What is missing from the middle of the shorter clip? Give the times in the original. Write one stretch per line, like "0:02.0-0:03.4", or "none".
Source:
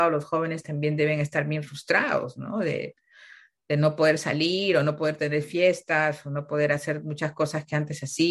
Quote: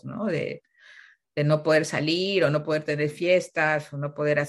none